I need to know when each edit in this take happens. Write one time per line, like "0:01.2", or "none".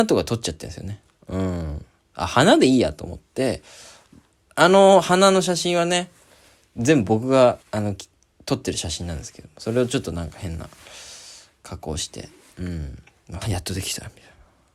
0:07.6
0:13.4